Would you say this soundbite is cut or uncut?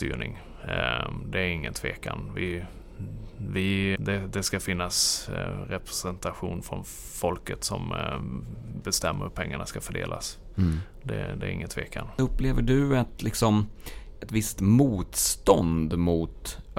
cut